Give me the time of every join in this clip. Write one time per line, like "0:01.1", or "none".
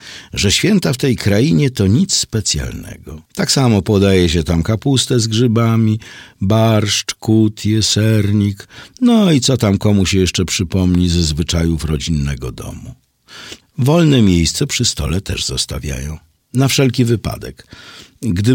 0:03.3
0:13.6